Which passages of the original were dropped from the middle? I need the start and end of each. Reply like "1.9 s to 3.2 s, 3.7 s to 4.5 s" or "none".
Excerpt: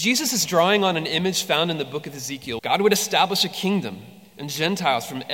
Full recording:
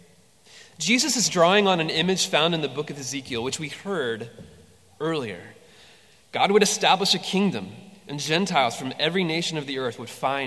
3.4 s to 6.3 s